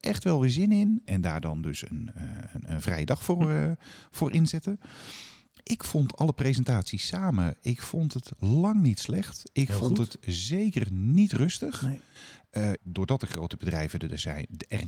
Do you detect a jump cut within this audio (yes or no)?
yes